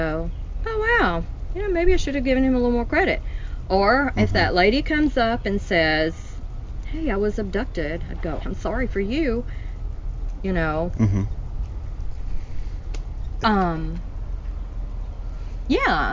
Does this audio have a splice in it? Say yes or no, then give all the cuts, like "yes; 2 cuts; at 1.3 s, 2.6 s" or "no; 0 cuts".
yes; 2 cuts; at 8.4 s, 13.4 s